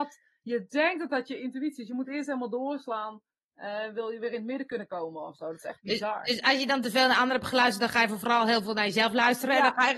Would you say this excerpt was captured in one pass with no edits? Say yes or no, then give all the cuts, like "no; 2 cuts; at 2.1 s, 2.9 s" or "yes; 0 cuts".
yes; 0 cuts